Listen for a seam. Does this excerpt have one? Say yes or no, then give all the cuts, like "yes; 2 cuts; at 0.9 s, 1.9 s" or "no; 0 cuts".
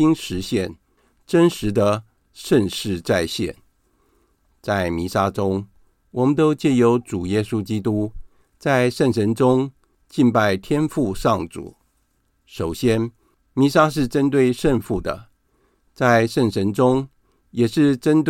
no; 0 cuts